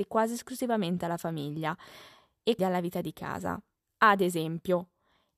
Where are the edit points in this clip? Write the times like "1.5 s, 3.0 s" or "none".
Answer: 2.6 s